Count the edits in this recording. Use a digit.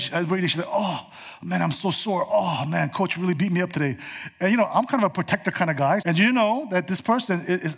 1